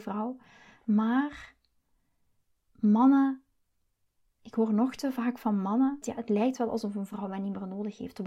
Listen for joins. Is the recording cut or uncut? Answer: cut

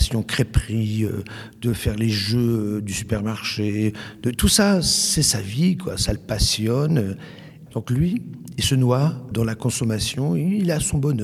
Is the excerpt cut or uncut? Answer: cut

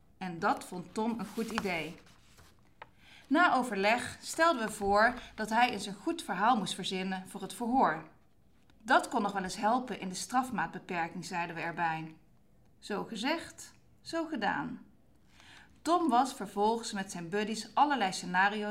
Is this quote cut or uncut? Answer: uncut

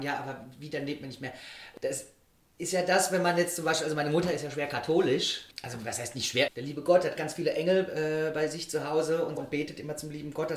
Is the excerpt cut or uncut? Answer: cut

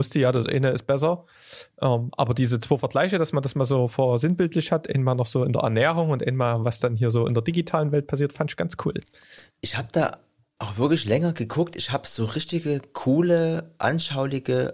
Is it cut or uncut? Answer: cut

